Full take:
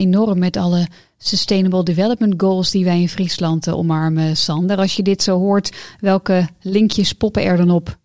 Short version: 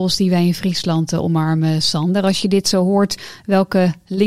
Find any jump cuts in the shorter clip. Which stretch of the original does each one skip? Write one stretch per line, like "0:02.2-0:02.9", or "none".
none